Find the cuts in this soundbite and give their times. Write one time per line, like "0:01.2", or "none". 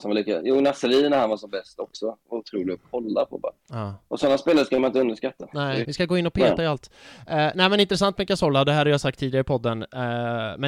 0:05.8